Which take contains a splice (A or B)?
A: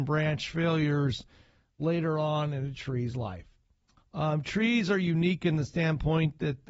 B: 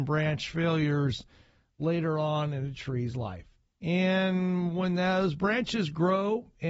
B